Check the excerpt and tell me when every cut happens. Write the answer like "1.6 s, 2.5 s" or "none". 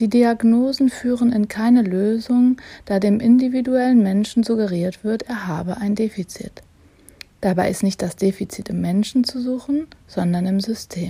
none